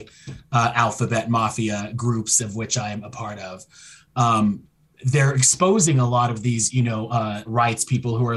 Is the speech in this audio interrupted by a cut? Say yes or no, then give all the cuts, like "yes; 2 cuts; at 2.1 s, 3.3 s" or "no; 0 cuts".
yes; 1 cut; at 7.4 s